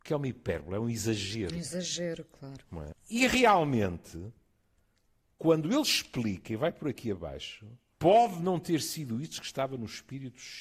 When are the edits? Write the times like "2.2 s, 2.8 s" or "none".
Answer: 2.9 s, 7.9 s